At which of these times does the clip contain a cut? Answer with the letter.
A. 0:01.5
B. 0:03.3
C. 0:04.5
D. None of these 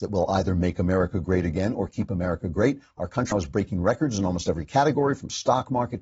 B